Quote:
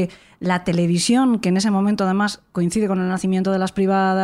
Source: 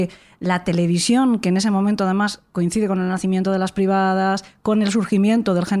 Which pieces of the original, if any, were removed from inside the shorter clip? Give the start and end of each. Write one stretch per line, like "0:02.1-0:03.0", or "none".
none